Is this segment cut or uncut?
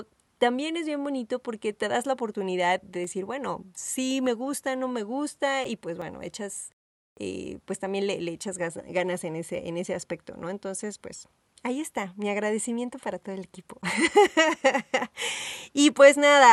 uncut